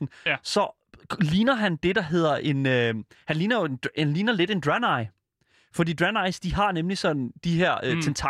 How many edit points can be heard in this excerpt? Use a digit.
0